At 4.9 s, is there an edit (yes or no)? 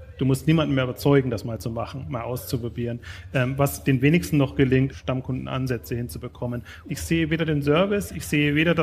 yes